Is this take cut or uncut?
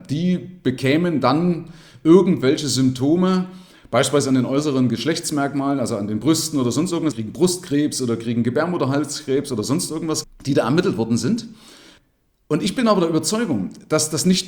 cut